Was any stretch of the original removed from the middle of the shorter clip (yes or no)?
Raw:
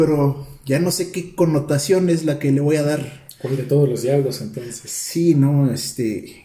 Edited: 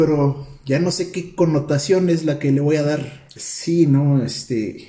yes